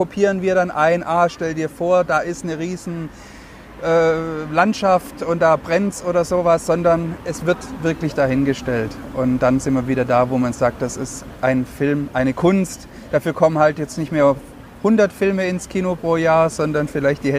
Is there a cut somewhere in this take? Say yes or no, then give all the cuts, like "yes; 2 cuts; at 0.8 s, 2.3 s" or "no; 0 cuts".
no; 0 cuts